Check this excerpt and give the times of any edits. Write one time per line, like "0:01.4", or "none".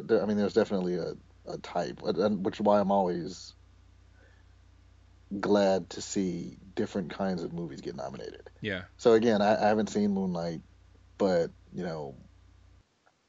none